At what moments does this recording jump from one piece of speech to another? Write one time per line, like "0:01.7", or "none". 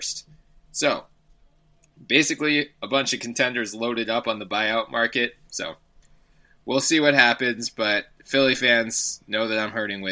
0:05.5